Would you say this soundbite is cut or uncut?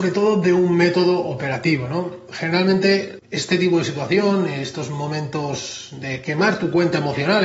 uncut